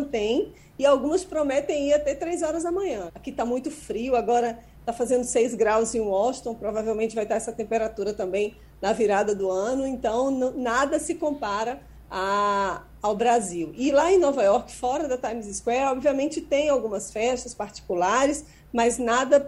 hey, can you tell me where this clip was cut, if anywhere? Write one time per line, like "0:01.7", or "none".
0:03.1